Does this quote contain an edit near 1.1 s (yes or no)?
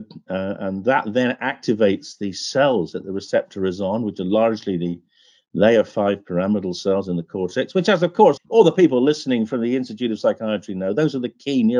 no